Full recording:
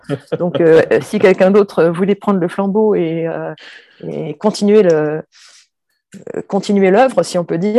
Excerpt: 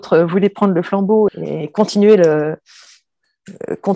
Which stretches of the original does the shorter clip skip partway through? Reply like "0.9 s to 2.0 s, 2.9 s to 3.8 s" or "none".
2.9 s to 3.9 s